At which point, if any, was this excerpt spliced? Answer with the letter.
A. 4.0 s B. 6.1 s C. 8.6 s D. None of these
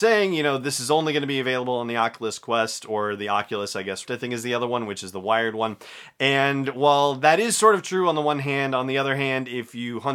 A